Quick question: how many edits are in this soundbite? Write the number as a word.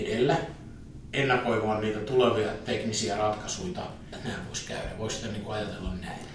one